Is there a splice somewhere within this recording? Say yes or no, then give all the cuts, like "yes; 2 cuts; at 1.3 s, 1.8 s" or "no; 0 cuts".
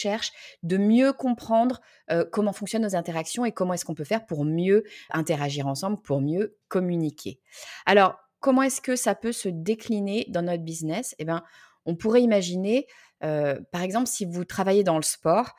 yes; 1 cut; at 5.1 s